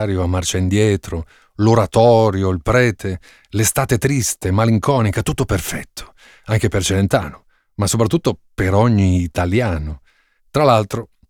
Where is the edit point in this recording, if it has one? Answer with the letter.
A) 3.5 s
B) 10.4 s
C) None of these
B